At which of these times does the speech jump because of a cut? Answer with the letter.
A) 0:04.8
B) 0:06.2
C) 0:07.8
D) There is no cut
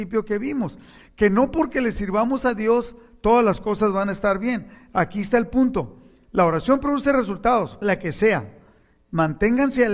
C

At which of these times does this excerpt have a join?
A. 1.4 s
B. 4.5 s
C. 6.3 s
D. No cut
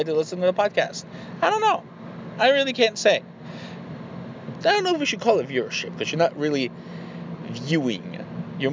B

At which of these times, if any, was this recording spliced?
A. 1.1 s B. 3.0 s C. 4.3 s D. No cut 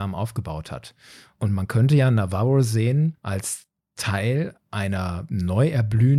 D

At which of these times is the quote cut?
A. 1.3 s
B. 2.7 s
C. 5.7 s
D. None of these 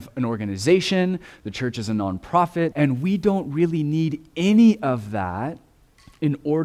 B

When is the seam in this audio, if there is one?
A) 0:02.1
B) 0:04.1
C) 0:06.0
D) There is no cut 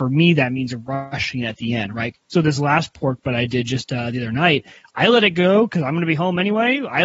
A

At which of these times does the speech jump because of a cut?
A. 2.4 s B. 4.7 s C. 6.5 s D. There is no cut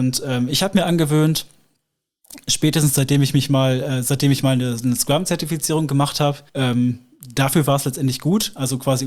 C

